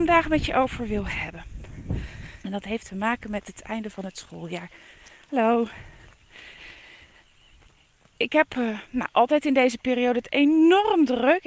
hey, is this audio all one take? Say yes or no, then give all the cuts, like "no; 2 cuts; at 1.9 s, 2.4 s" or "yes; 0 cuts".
no; 1 cut; at 2.4 s